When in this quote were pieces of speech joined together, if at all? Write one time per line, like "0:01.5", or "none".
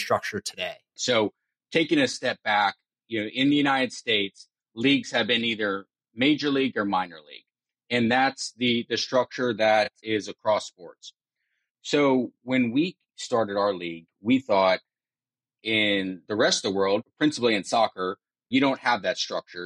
0:01.0